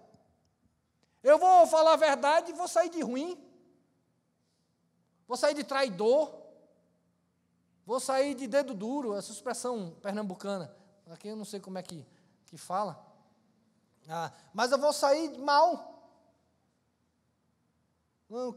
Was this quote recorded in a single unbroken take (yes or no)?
yes